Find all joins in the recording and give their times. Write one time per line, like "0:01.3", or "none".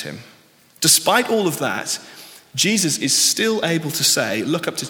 none